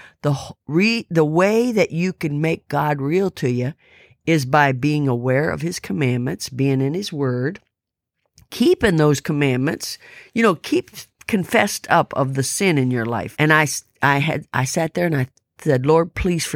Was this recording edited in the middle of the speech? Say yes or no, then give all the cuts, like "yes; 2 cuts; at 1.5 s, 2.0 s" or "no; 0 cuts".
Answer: yes; 1 cut; at 13.3 s